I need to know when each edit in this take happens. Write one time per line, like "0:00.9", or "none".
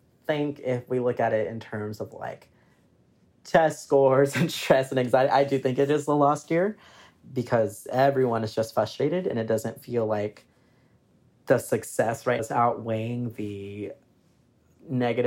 0:12.4